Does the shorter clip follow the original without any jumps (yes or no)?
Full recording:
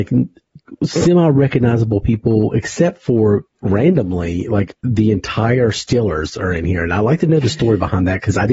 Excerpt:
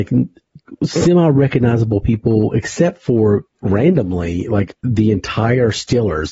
yes